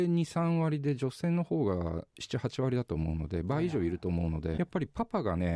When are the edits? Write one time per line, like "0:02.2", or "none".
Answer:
0:04.6